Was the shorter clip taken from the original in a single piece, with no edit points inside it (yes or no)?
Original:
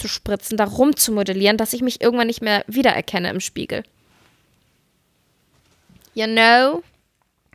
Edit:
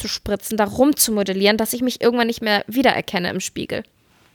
yes